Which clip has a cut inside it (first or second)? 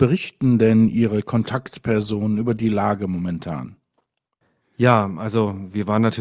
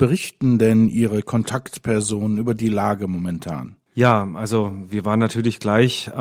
second